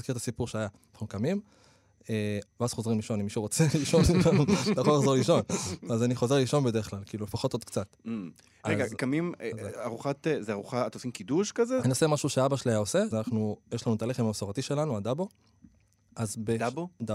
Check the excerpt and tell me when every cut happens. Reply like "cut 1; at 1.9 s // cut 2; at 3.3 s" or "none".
cut 1; at 2.4 s // cut 2; at 13.1 s

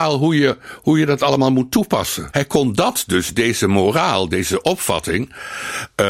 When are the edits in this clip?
cut 1; at 2.3 s

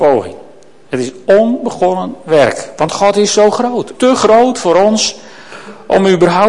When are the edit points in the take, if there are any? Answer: cut 1; at 3.9 s

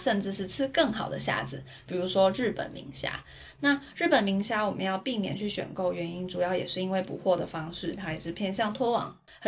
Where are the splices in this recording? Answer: none

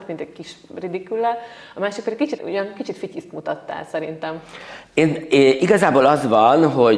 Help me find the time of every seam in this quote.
cut 1; at 2.4 s

